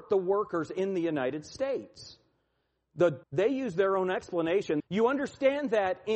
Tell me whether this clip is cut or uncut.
cut